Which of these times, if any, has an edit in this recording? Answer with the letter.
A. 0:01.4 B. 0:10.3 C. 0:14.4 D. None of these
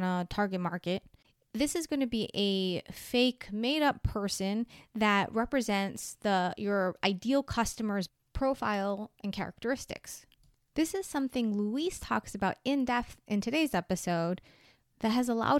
D